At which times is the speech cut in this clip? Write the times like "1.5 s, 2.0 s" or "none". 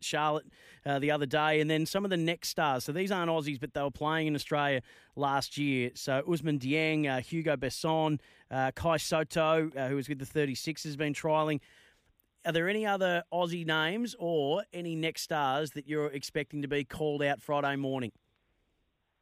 none

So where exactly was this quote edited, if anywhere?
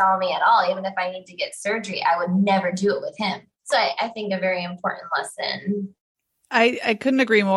3.7 s

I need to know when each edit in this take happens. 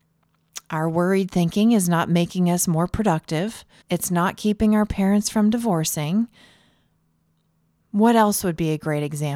3.8 s

